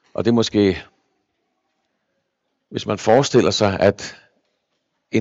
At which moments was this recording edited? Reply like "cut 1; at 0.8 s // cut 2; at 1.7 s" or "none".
none